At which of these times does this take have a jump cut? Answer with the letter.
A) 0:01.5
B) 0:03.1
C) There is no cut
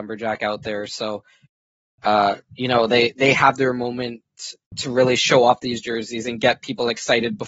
B